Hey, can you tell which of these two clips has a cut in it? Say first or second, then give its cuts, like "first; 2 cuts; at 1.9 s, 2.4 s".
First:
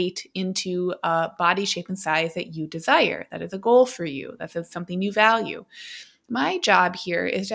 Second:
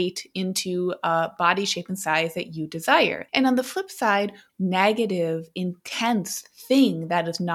second; 2 cuts; at 3.3 s, 4.5 s